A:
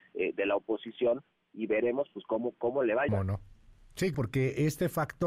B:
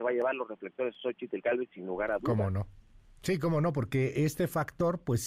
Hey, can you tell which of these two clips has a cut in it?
A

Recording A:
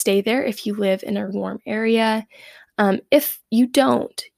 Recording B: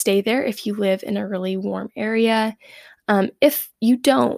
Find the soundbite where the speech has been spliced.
A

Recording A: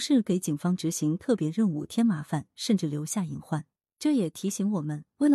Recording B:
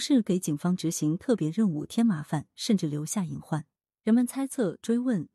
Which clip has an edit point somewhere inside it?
B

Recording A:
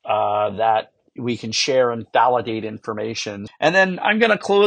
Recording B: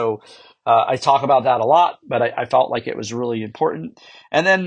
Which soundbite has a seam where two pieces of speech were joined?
A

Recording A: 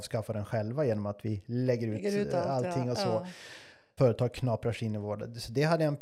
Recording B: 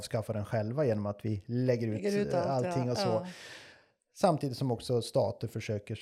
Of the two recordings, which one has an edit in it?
A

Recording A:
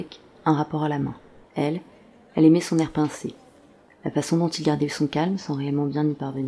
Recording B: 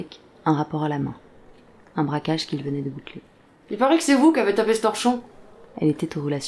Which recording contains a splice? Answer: A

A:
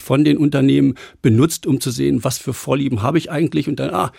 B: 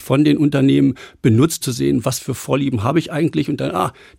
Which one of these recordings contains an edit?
B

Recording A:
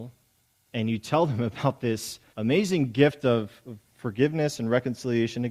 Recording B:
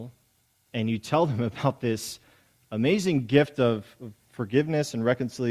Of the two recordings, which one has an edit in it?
A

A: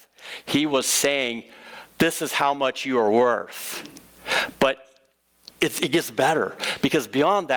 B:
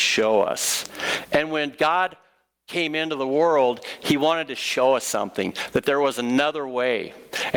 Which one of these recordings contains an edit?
B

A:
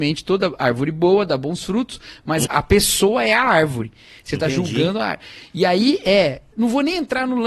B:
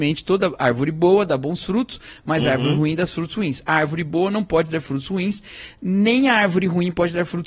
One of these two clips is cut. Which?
A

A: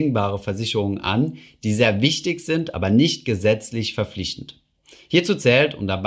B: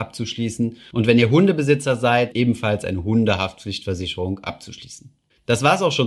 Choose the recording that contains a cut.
B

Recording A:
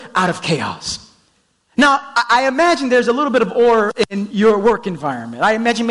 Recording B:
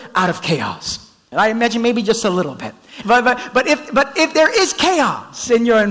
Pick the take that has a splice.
B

